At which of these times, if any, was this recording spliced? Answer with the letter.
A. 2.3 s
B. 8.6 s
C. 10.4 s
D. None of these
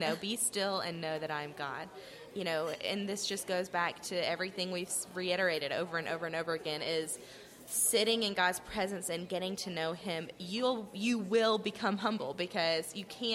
A